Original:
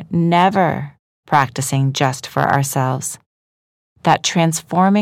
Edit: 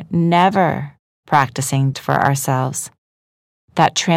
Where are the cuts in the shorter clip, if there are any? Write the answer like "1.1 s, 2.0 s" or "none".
1.9 s

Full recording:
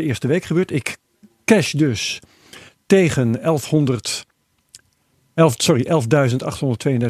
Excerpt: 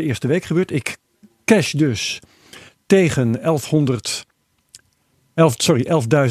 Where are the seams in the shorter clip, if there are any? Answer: none

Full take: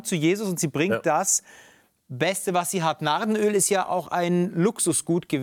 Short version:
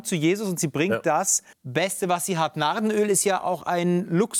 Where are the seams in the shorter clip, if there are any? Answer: 1.5 s

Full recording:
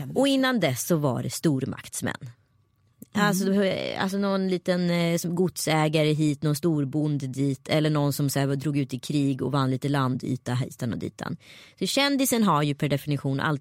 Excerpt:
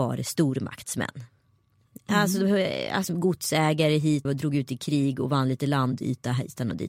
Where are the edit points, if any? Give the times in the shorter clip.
3.0 s, 4.2 s

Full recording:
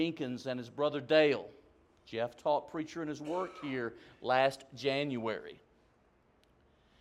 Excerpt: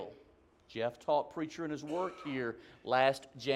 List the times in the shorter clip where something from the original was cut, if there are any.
none

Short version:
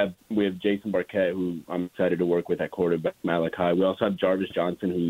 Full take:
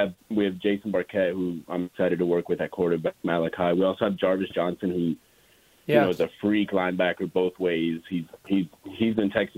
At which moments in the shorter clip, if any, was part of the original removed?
none

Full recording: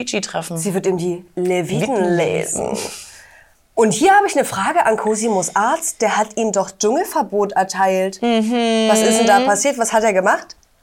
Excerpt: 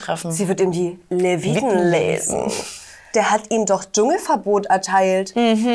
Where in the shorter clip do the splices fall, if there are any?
3.1 s

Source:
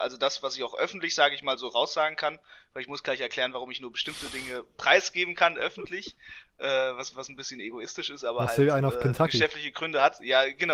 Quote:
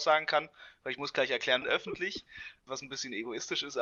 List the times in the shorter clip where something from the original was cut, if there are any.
1.6 s, 2.7 s

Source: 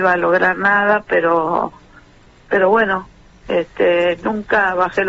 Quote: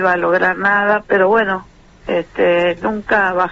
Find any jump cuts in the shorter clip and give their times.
1.0 s

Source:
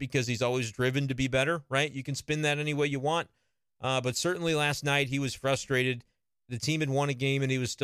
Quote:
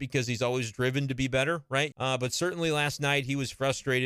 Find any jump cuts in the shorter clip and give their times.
1.9 s

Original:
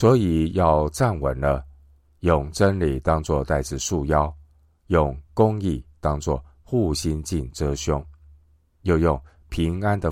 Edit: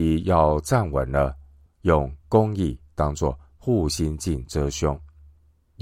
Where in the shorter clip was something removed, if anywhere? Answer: 1.7 s

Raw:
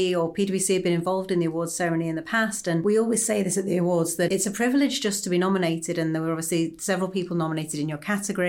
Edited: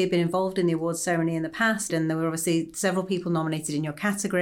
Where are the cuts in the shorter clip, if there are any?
1.9 s

